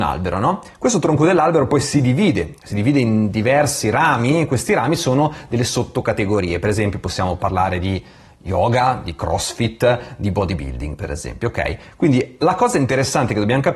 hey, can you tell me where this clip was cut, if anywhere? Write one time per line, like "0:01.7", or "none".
none